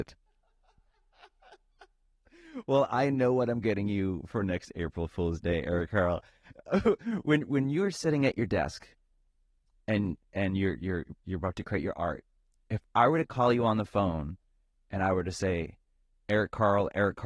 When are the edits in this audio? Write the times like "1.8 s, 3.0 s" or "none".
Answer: none